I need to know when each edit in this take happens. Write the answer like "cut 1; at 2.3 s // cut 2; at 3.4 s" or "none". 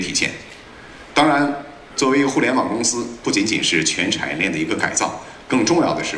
cut 1; at 3.2 s